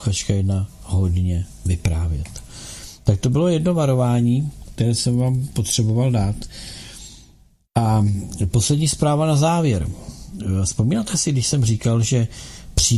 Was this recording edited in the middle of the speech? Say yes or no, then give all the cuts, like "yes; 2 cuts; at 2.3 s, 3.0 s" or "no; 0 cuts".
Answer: no; 0 cuts